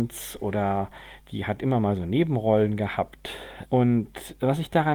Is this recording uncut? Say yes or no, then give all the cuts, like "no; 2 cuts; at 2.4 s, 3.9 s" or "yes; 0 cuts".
no; 1 cut; at 3.7 s